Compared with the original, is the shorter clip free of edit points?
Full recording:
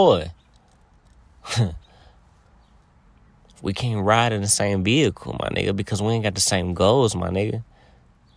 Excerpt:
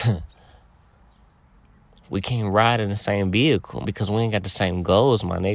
no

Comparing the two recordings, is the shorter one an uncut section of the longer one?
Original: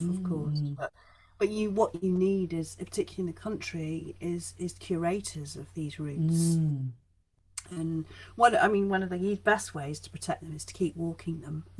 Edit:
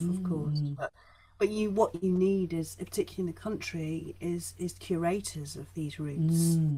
yes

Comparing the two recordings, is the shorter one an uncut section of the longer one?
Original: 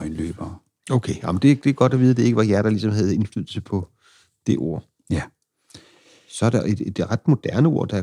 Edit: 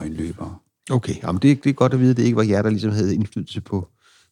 yes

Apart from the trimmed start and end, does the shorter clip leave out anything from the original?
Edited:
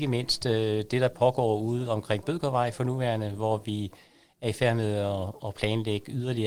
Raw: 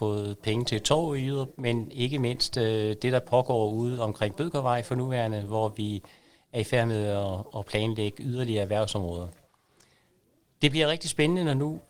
no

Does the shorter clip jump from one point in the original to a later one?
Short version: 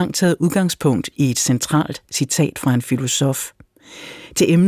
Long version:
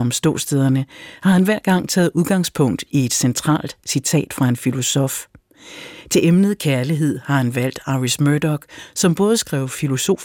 no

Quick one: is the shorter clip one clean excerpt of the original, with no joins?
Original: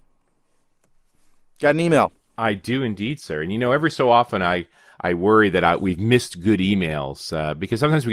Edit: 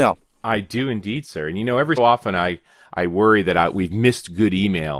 no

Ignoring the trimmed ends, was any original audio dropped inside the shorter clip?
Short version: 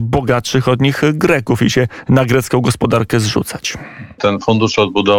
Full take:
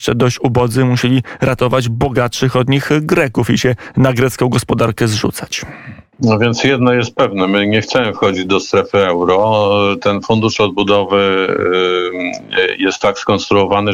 yes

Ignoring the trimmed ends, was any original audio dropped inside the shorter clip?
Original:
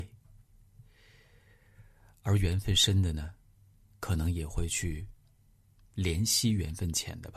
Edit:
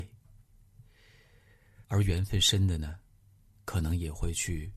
yes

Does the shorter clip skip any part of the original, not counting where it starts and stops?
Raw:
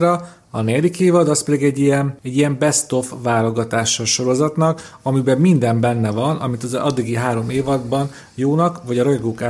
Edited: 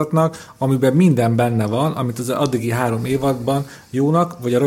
no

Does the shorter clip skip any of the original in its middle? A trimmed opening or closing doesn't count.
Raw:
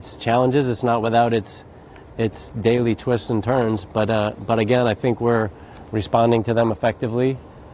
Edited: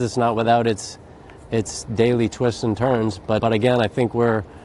yes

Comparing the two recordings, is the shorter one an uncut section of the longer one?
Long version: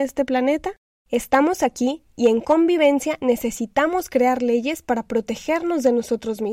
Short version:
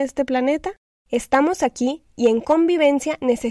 yes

